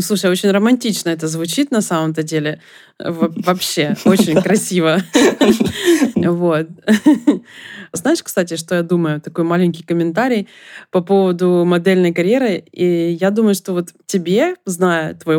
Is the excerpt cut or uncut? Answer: cut